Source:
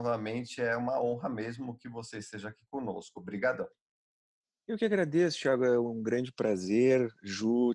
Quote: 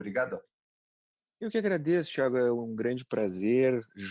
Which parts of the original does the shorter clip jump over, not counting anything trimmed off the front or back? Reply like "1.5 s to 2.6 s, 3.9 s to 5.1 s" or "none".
none